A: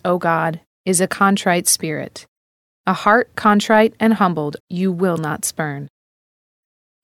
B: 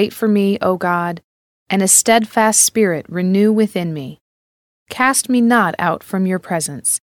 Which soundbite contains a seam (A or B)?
A